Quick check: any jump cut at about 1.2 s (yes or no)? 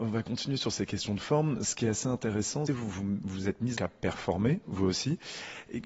no